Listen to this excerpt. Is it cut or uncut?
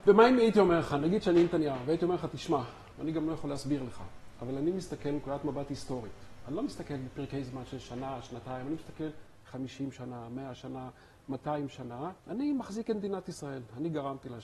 cut